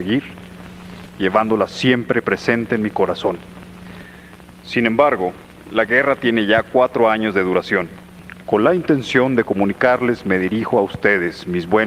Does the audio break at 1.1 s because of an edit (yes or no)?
yes